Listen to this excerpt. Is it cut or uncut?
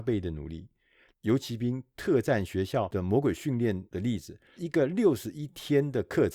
cut